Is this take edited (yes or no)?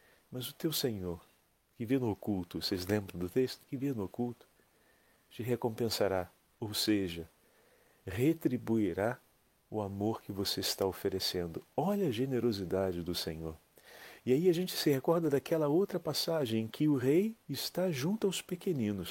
yes